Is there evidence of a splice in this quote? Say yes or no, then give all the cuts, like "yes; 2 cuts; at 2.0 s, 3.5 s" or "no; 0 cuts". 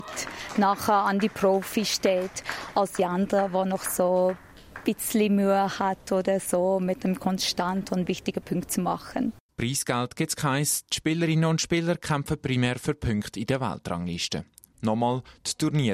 yes; 2 cuts; at 9.5 s, 14.7 s